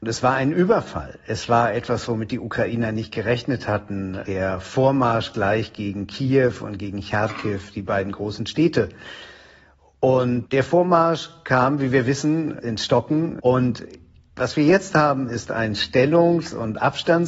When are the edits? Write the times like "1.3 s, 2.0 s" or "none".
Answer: 13.4 s